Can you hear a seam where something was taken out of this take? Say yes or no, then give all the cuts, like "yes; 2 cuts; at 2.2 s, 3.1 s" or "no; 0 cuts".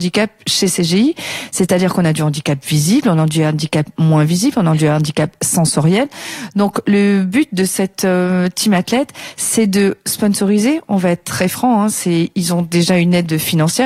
no; 0 cuts